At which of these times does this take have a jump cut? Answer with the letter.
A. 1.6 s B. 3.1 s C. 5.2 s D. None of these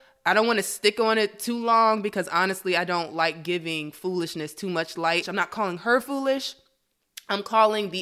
C